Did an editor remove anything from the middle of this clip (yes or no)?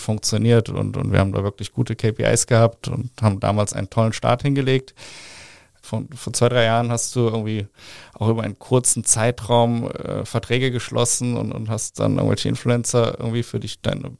yes